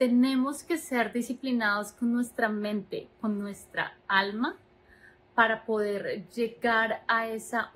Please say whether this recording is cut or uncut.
cut